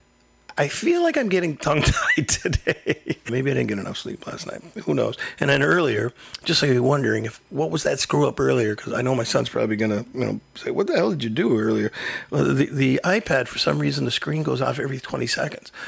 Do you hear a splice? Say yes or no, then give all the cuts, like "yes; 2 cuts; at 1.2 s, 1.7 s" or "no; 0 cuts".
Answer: yes; 1 cut; at 3.3 s